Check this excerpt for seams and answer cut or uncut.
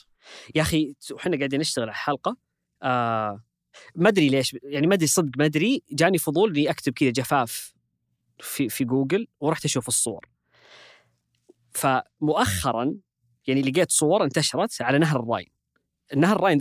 uncut